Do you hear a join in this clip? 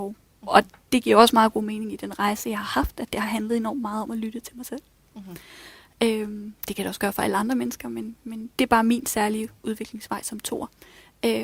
no; 0 cuts

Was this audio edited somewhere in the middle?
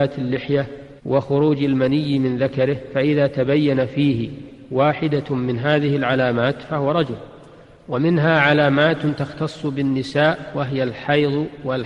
yes; 1 cut; at 1.0 s

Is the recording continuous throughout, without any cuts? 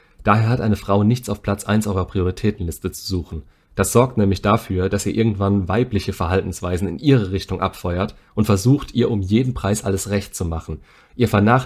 yes; 0 cuts

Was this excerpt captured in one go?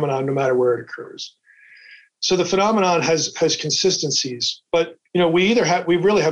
yes; 0 cuts

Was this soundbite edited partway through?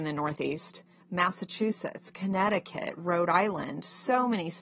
yes; 1 cut; at 1.0 s

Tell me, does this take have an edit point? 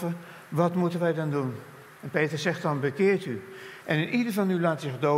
no; 0 cuts

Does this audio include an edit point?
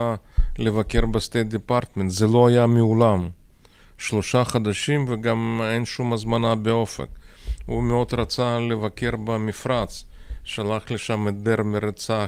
no; 0 cuts

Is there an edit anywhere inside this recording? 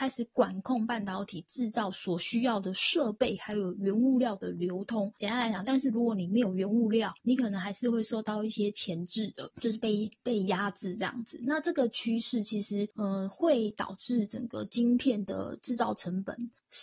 yes; 1 cut; at 5.6 s

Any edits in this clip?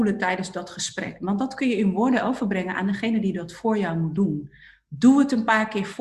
no; 0 cuts

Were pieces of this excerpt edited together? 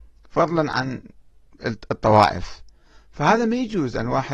no; 0 cuts

